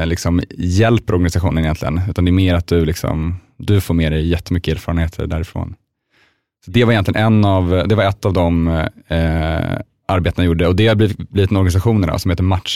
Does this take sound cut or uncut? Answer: uncut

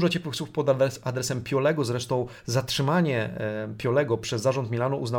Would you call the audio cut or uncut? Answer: uncut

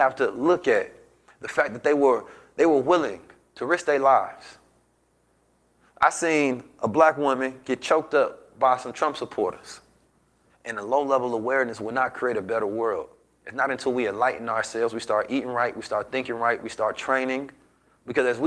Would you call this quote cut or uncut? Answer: cut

